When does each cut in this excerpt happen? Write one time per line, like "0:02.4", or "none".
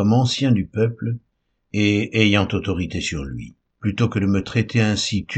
0:03.7